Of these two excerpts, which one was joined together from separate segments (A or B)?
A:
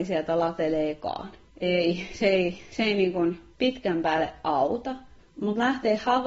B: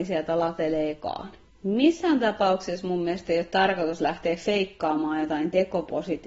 A